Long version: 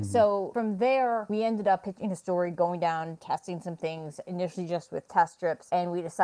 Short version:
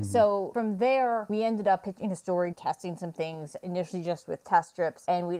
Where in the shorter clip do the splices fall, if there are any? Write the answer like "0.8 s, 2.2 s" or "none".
2.5 s